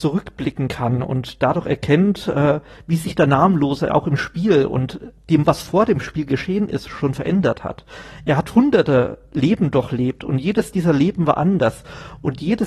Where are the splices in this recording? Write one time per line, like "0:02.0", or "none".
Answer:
none